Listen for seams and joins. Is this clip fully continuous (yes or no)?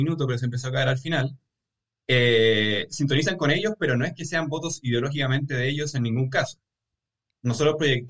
yes